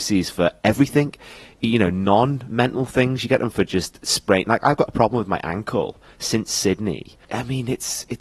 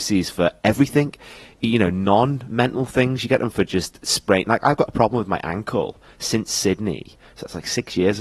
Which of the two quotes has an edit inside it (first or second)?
first